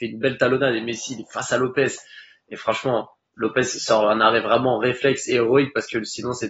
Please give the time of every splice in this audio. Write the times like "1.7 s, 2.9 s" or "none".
none

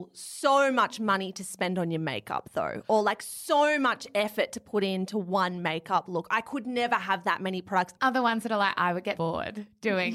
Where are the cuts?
8.0 s, 9.2 s

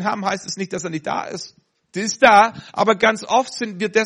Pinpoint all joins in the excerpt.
1.7 s

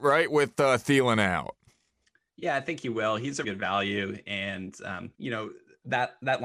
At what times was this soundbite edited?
3.4 s, 5.1 s

